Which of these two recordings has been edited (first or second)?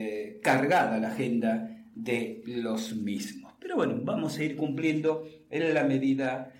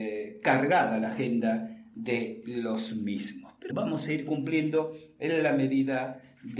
second